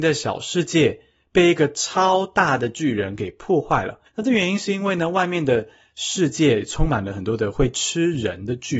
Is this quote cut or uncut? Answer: cut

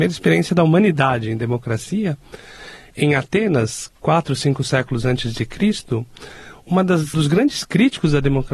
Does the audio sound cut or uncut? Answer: cut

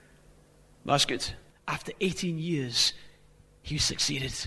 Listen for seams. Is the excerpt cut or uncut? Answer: cut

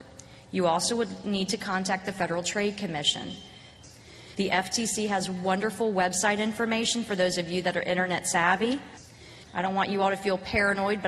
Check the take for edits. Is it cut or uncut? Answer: cut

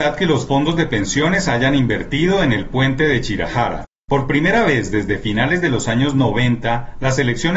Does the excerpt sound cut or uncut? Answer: cut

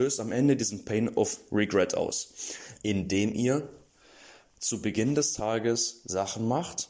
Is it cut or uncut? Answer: cut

